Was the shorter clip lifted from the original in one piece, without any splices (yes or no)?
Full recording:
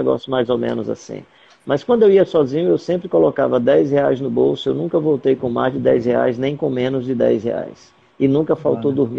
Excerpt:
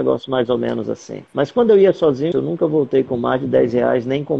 no